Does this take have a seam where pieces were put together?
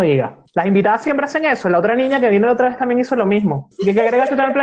no; 0 cuts

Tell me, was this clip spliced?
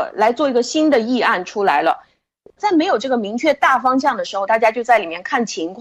yes; 2 cuts; at 2.6 s, 4.5 s

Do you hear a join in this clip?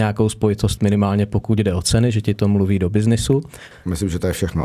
yes; 1 cut; at 3.7 s

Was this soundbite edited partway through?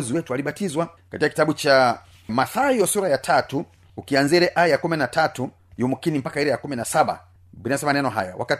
yes; 1 cut; at 2.3 s

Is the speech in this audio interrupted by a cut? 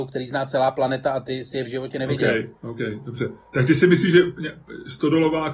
no; 0 cuts

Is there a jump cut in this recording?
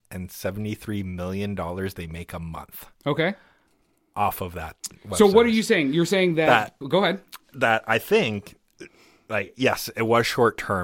yes; 1 cut; at 6.8 s

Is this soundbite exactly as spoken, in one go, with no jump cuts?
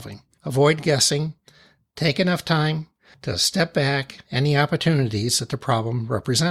no; 1 cut; at 4.2 s

